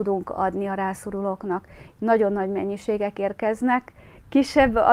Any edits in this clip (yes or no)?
no